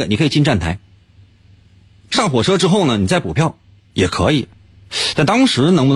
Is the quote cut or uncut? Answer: uncut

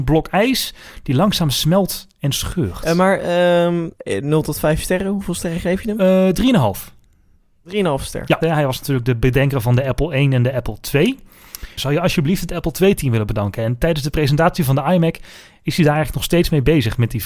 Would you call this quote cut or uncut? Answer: cut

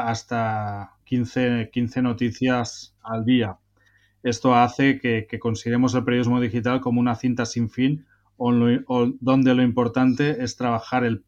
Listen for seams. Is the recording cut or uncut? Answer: cut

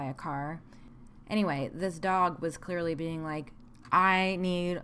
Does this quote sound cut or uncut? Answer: uncut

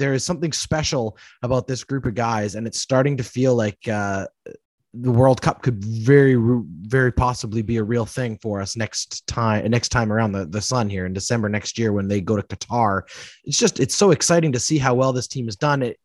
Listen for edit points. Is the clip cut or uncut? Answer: uncut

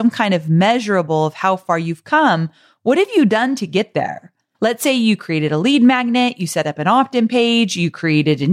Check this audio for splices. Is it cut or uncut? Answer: cut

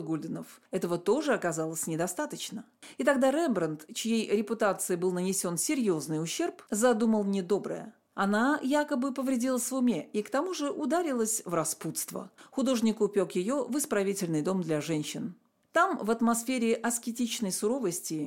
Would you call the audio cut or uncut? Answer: cut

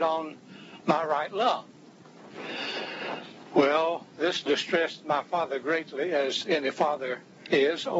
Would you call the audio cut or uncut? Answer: uncut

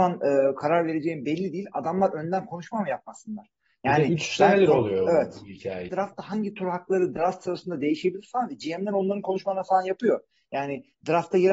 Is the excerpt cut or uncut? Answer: cut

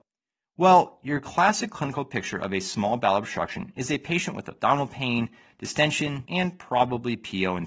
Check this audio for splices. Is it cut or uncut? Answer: cut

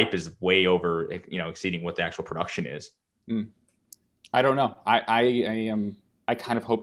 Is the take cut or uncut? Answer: uncut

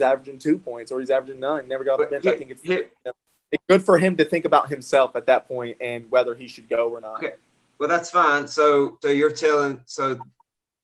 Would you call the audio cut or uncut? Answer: cut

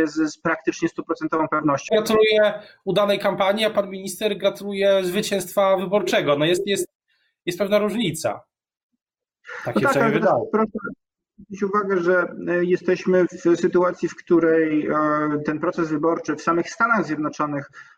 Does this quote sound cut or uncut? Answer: cut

